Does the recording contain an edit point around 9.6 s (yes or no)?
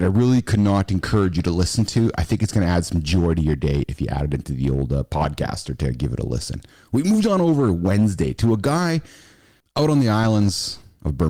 yes